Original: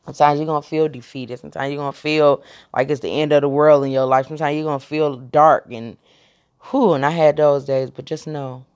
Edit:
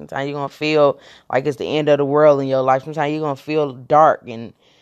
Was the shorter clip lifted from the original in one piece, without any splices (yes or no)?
yes